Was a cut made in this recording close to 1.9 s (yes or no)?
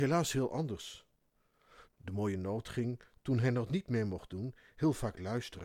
yes